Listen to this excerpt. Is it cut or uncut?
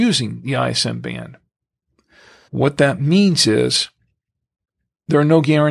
cut